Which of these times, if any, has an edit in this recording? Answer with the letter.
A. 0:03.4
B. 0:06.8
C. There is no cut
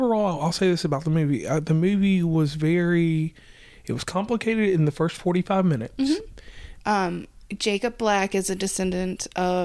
B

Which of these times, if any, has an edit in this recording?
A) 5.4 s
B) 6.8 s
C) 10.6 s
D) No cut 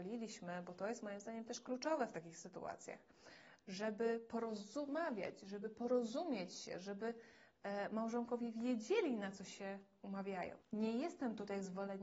C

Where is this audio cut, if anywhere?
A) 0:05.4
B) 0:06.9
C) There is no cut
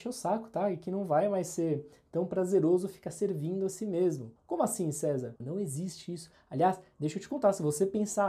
A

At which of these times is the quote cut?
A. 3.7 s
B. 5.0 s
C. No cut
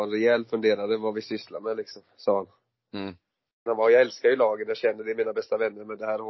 A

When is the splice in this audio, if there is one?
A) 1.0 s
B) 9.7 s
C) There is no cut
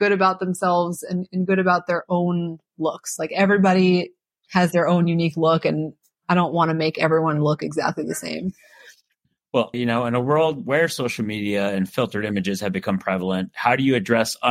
B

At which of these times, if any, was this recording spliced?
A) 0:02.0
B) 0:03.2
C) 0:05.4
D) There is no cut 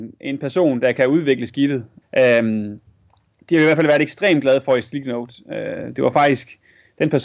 A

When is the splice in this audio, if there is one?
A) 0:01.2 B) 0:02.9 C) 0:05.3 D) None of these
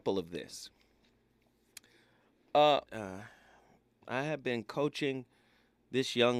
B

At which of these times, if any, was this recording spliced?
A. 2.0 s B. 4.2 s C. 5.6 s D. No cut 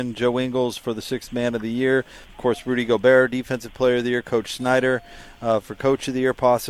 D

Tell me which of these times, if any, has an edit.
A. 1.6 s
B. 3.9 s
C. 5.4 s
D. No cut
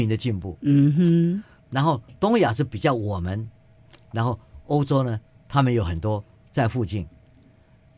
A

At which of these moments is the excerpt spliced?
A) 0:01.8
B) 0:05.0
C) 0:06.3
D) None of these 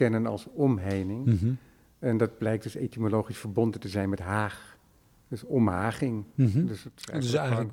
D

